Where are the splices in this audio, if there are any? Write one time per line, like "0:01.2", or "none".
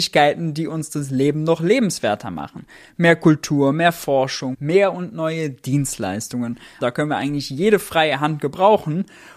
0:04.5
0:06.8